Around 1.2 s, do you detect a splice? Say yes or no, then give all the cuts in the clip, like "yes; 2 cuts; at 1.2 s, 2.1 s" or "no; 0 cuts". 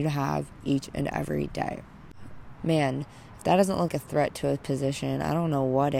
no; 2 cuts; at 2.6 s, 3.9 s